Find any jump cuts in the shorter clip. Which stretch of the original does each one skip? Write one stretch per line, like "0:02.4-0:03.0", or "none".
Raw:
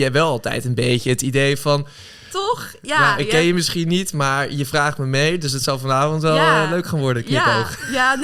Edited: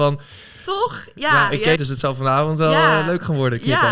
0:03.4-0:05.4